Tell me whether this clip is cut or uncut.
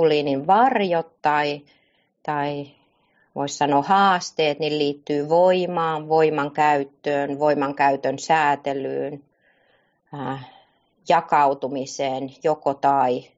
uncut